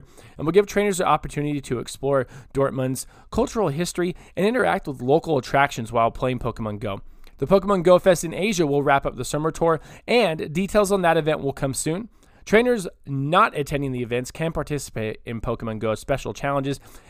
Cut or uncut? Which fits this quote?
cut